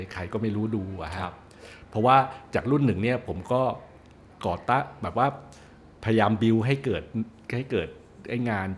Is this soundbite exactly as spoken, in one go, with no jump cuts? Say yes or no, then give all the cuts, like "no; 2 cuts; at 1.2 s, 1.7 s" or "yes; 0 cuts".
yes; 0 cuts